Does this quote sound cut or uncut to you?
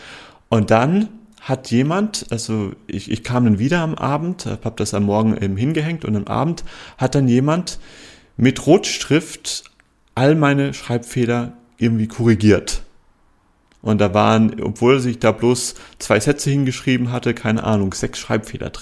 uncut